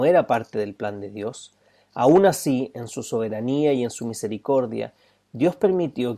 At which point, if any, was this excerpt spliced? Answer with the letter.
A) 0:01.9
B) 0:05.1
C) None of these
C